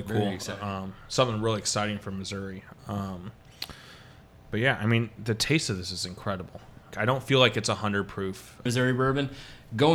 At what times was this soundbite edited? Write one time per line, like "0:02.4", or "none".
0:06.9
0:08.7